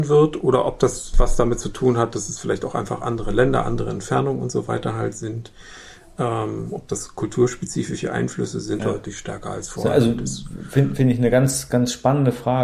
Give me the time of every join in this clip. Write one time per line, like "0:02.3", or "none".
0:08.8